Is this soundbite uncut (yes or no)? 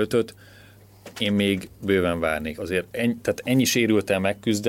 yes